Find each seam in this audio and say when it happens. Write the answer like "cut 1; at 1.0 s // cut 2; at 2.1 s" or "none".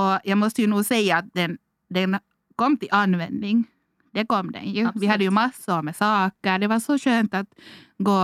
none